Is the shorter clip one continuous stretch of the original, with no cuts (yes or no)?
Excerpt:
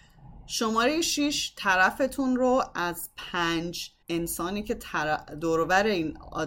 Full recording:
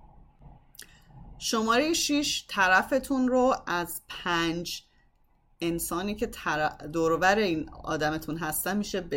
no